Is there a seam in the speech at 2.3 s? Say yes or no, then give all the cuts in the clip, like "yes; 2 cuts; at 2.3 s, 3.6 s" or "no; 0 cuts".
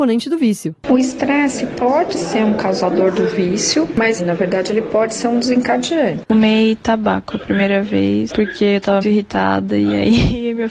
no; 3 cuts; at 4.2 s, 6.2 s, 9.0 s